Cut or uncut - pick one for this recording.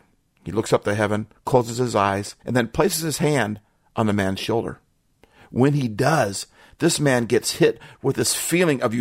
cut